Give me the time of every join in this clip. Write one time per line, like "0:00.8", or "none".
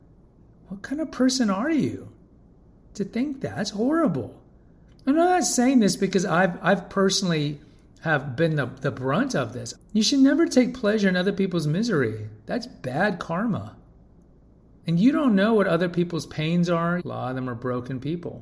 0:09.7
0:17.0